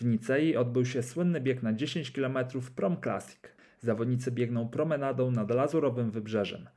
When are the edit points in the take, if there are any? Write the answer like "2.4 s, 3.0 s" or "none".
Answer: 3.8 s